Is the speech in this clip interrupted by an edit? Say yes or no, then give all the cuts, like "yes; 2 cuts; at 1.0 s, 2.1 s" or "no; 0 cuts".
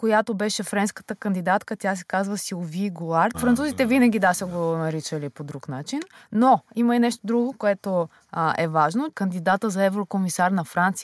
yes; 2 cuts; at 3.3 s, 9.1 s